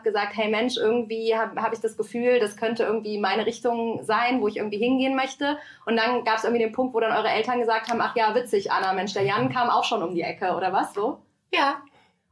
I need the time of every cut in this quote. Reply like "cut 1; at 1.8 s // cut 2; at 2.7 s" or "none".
cut 1; at 11.0 s